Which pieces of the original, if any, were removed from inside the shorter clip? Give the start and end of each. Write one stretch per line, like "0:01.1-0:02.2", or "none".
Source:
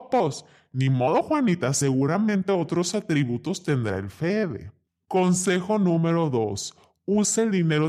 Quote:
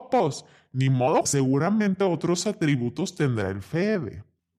0:01.3-0:01.7